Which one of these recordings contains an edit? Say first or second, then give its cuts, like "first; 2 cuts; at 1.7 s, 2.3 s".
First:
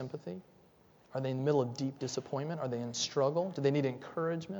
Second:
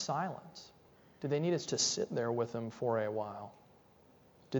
second; 1 cut; at 1.7 s